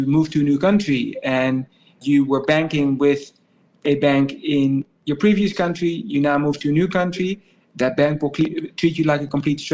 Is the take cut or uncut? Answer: uncut